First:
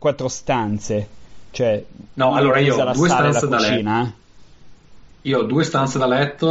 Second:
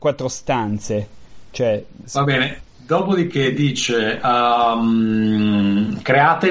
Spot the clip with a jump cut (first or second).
second